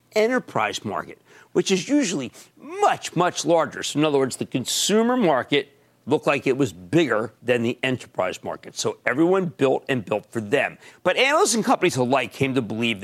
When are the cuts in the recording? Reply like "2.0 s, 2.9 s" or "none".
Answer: 7.4 s, 10.9 s